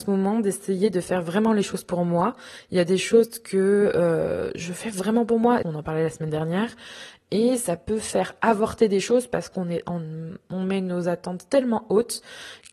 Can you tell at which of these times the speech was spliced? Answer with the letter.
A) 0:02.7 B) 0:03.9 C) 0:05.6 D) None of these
C